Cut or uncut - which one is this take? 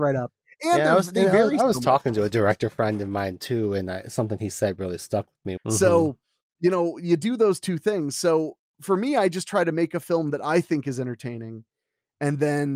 cut